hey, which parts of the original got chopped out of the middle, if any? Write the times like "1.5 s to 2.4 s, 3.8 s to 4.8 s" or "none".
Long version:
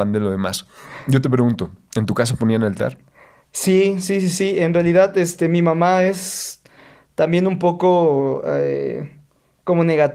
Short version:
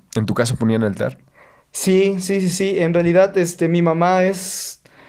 none